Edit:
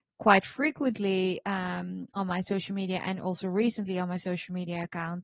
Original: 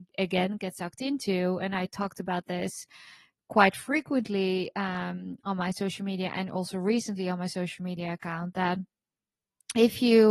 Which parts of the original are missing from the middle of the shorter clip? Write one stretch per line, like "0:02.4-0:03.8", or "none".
none